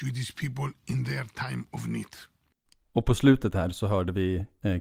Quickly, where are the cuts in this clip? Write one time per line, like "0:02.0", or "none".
none